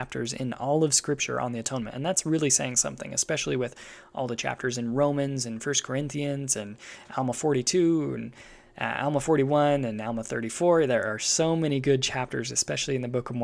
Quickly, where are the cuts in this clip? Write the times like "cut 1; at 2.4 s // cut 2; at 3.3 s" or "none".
none